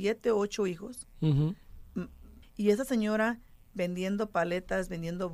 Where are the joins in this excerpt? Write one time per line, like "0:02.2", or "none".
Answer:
0:02.4